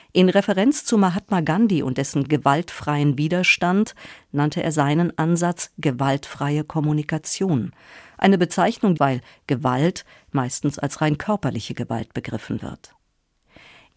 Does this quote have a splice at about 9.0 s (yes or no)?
yes